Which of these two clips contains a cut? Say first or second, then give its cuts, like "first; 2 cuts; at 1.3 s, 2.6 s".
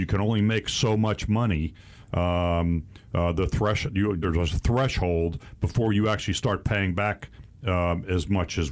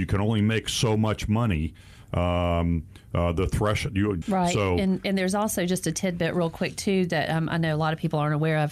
second; 1 cut; at 4.2 s